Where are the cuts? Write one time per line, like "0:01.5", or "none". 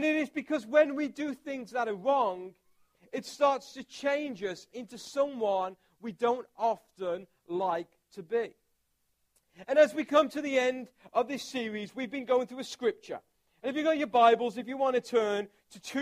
none

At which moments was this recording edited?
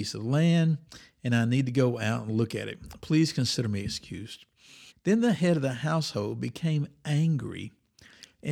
0:04.9

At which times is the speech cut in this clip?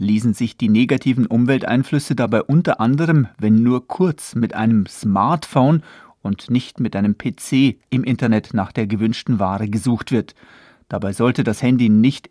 0:07.9

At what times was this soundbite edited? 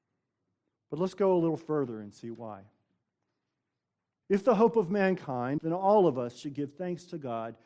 0:04.2
0:05.6

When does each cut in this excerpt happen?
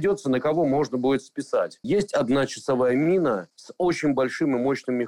0:01.8

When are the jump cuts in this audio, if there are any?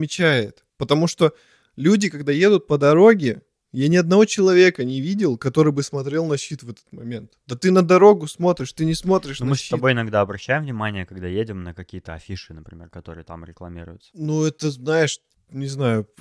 none

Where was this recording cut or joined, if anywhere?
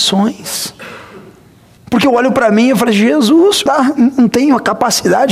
0:01.8
0:03.7

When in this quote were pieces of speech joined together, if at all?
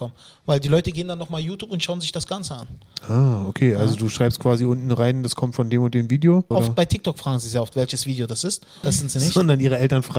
0:06.5
0:08.8

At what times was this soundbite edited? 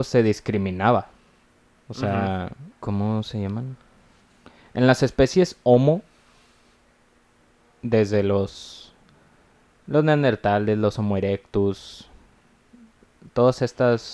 0:02.7

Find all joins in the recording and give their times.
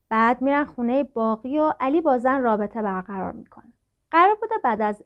none

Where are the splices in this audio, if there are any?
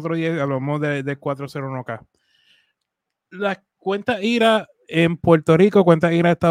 none

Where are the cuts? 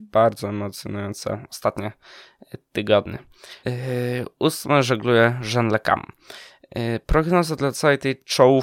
0:03.6

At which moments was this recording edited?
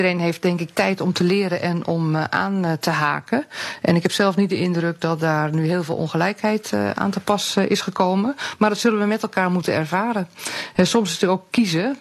none

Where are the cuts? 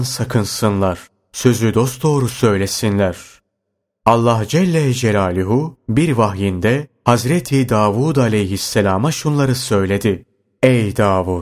none

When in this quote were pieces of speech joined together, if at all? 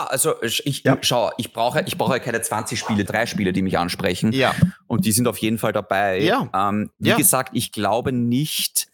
0:03.1

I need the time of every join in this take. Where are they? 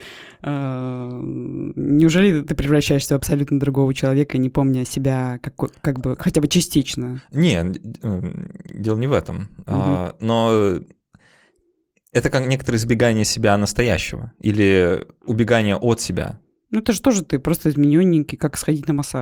none

